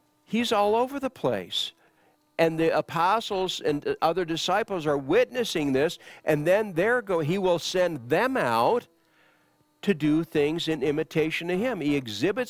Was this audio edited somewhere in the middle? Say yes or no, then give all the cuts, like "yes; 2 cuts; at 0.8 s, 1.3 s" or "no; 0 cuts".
no; 0 cuts